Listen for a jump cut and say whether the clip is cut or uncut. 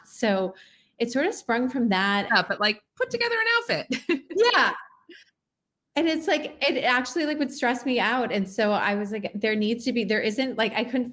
cut